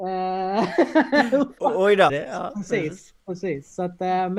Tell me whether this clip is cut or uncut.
cut